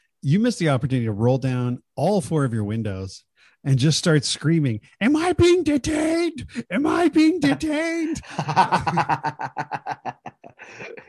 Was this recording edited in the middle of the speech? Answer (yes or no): no